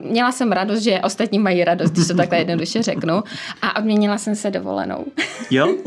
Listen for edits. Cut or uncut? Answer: uncut